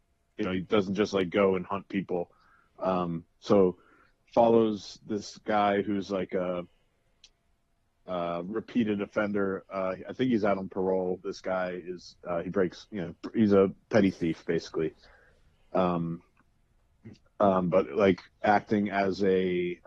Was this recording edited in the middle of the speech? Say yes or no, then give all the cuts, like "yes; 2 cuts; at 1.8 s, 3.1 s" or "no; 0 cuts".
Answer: no; 0 cuts